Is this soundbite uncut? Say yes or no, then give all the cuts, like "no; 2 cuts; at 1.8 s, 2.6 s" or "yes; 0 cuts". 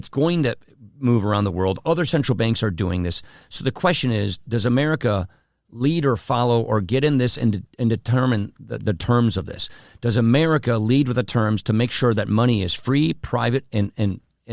yes; 0 cuts